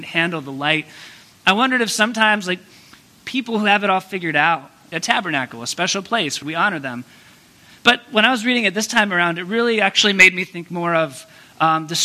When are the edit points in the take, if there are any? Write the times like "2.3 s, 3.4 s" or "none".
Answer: 4.9 s, 6.4 s